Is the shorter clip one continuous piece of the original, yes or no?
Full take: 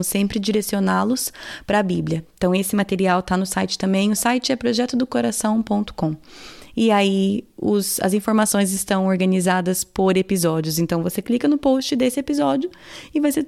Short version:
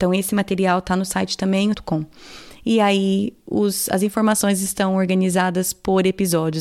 no